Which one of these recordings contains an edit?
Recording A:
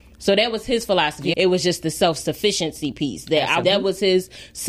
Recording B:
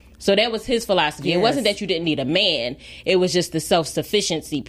A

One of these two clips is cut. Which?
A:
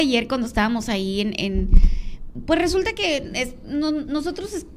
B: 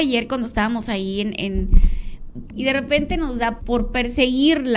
B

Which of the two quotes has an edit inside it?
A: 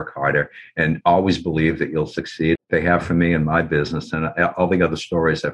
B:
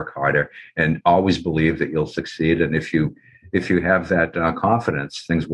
A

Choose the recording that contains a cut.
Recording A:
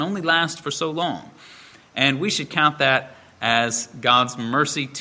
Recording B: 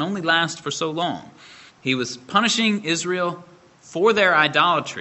B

